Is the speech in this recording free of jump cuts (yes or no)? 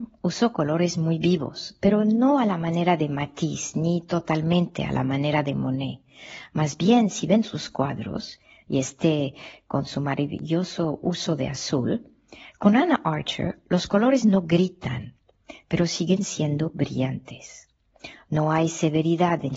yes